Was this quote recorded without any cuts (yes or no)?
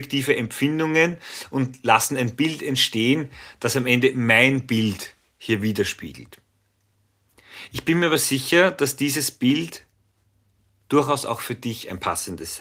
yes